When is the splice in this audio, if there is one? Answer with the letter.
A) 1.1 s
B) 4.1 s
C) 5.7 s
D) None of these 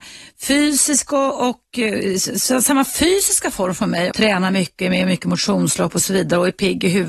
B